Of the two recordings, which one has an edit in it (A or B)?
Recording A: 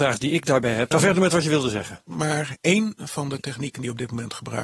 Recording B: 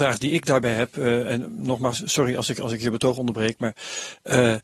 A